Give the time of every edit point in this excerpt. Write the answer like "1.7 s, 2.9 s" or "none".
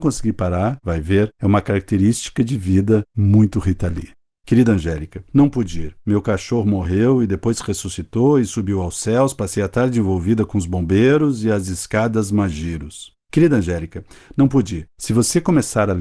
4.4 s, 14.9 s